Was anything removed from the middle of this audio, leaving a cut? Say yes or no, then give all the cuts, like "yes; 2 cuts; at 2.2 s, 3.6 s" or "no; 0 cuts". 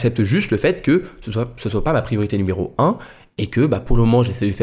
no; 0 cuts